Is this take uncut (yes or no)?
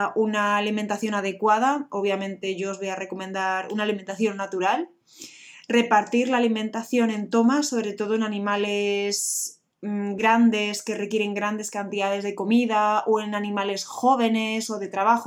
yes